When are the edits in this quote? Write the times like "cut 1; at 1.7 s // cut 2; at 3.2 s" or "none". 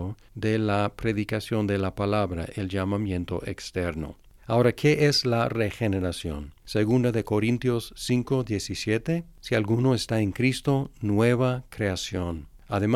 cut 1; at 6.6 s